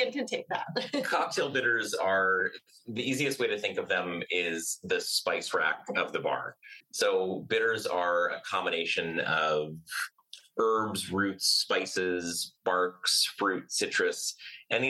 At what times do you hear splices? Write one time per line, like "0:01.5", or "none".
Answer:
0:06.8